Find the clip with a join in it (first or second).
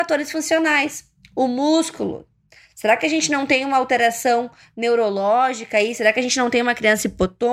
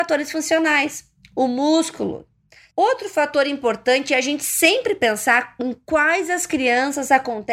second